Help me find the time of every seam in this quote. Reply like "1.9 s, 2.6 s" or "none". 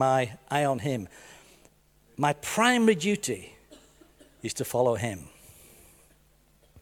none